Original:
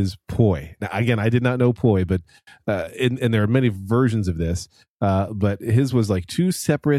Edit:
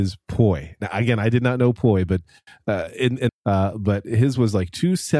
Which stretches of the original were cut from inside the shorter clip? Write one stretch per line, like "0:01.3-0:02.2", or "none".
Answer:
0:03.3-0:04.8

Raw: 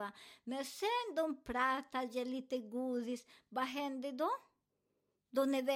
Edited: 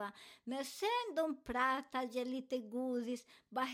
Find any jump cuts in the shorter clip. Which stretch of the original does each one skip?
none

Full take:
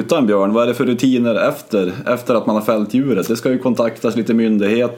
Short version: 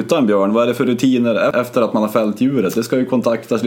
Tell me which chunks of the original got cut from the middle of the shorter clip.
0:01.5-0:02.0

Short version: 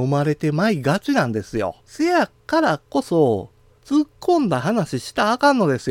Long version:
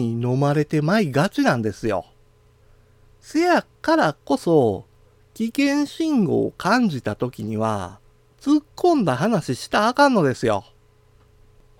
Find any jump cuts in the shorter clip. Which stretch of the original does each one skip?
0:02.1-0:03.2
0:05.1-0:08.3

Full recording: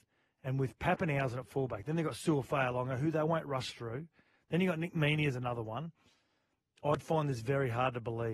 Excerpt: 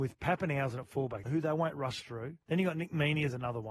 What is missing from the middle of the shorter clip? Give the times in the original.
0:01.8-0:03.0
0:04.1-0:04.4

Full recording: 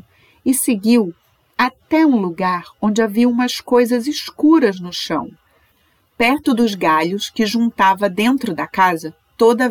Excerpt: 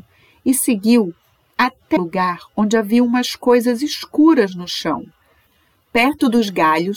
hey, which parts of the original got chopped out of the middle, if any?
0:02.0-0:02.2

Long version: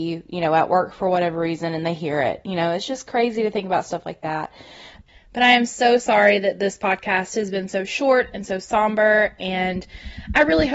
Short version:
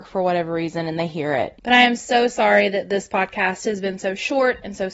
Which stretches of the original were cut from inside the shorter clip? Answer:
0:02.4-0:05.3

